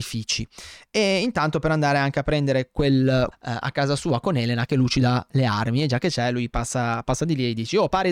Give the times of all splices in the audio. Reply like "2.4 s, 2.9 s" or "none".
3.3 s